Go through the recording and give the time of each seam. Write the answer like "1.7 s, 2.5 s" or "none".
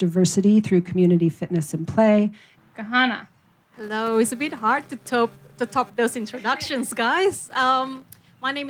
2.6 s